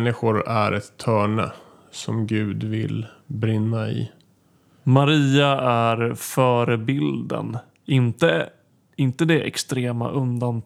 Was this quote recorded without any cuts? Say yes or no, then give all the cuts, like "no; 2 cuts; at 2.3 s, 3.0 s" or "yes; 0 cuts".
yes; 0 cuts